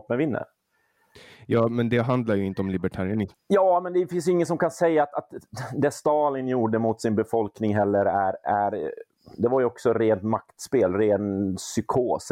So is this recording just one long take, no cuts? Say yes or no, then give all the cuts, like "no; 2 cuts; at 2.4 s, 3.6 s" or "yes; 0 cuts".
no; 1 cut; at 3.3 s